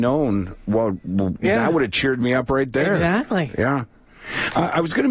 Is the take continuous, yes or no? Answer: yes